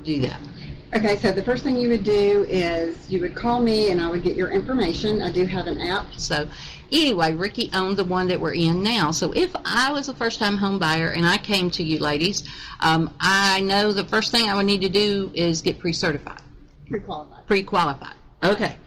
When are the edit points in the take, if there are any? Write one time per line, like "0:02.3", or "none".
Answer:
0:06.2